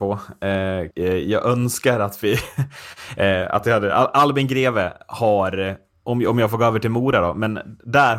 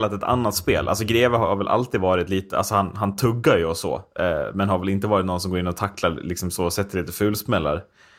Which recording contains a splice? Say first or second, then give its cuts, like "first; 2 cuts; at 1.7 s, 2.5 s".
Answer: first; 1 cut; at 0.9 s